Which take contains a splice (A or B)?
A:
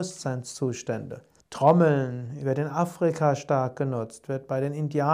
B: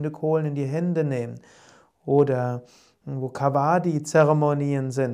A